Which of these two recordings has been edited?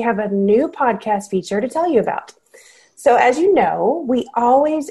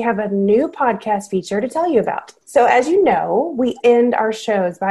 second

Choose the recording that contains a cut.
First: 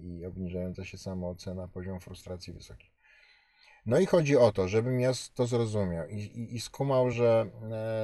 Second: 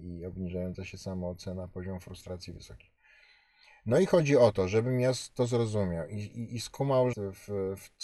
second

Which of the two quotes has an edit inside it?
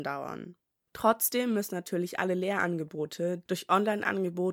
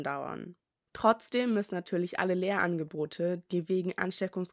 first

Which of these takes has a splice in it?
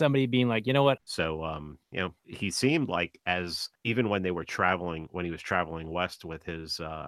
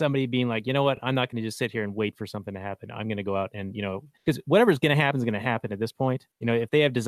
first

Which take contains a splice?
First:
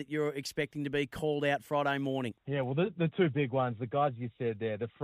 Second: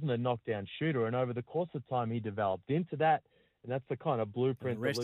first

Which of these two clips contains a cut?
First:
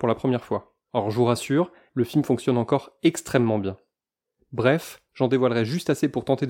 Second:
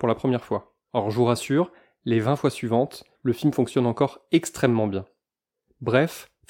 first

